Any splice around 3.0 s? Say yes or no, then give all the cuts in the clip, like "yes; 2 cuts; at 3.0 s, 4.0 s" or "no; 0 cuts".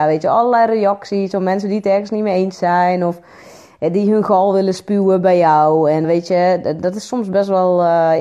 no; 1 cut; at 6.0 s